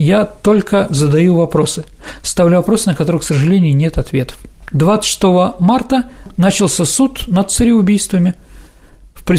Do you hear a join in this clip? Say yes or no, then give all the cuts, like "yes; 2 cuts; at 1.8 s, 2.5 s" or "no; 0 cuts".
no; 0 cuts